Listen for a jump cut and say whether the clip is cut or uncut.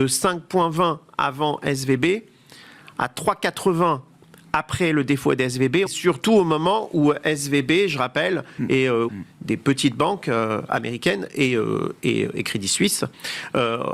cut